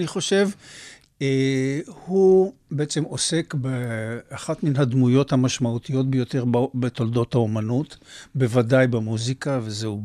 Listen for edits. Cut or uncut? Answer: uncut